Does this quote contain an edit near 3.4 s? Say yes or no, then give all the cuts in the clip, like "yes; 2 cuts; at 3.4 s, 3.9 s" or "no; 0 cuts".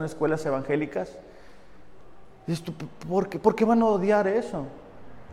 no; 0 cuts